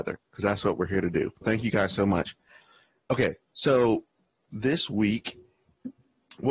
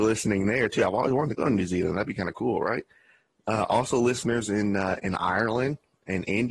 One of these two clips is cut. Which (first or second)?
first